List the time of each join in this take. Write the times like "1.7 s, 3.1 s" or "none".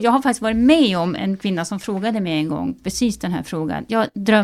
1.2 s